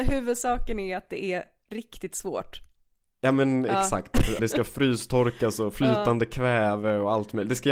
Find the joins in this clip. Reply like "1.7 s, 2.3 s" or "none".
4.4 s